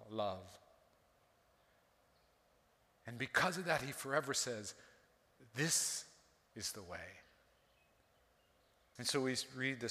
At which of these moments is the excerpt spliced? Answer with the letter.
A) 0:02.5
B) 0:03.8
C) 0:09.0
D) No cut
C